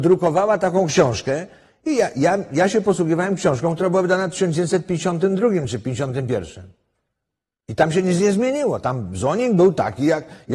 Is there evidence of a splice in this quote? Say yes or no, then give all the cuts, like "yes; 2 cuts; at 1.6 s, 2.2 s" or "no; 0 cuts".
no; 0 cuts